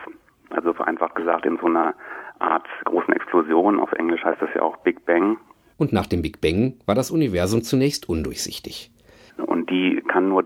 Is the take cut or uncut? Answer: cut